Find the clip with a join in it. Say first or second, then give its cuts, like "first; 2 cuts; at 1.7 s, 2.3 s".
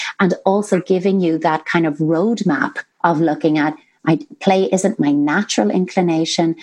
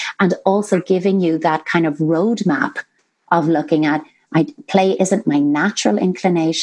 first; 1 cut; at 2.9 s